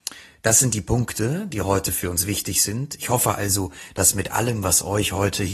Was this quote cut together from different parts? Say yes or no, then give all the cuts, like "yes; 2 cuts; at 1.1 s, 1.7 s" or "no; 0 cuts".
no; 0 cuts